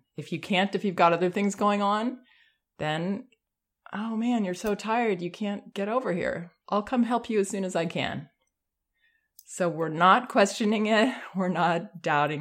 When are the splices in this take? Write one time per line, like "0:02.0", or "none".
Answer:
0:06.6